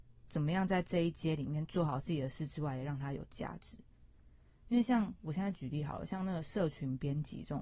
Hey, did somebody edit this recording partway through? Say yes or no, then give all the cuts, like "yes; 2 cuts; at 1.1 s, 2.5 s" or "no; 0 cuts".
no; 0 cuts